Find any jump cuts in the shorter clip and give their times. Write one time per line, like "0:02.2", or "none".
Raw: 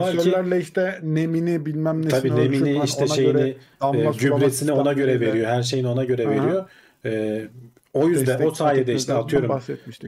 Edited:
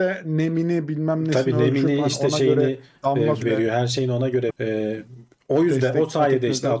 0:03.4
0:04.5